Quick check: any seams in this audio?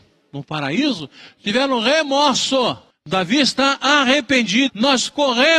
yes; 2 cuts; at 2.9 s, 4.7 s

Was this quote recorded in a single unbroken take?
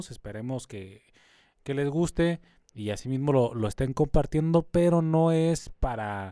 yes; 0 cuts

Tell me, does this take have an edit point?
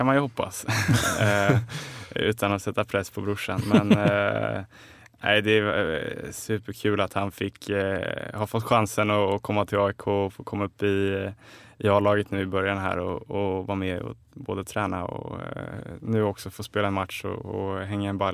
no; 0 cuts

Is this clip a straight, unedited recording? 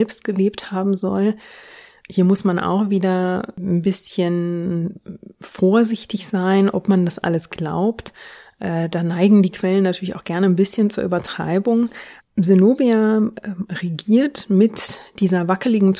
no; 1 cut; at 12.2 s

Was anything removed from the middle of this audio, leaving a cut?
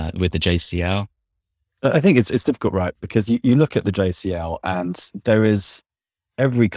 no; 0 cuts

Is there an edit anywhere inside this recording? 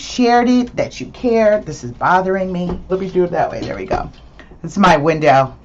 yes; 1 cut; at 2.9 s

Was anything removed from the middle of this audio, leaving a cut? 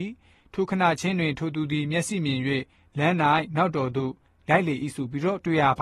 no; 0 cuts

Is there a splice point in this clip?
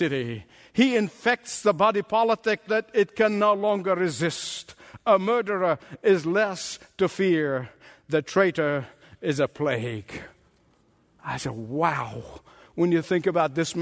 yes; 1 cut; at 2.7 s

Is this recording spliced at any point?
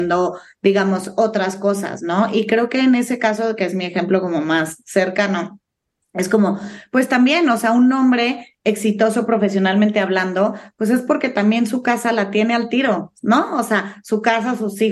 no; 0 cuts

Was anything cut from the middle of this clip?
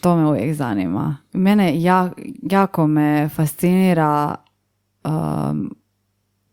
no; 0 cuts

